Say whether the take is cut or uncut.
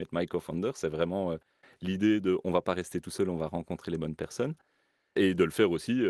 uncut